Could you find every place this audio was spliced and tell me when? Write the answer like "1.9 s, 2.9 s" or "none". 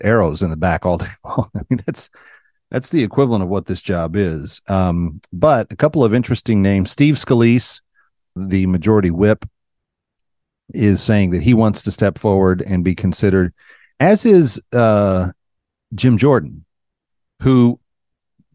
8.4 s